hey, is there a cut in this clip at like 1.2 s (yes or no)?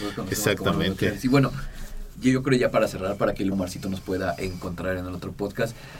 no